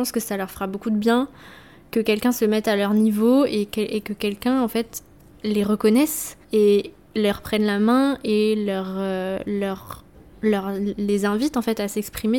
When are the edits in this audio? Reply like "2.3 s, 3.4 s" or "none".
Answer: 6.4 s